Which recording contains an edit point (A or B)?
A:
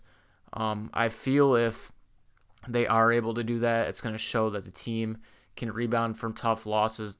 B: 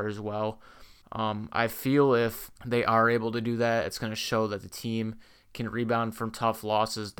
B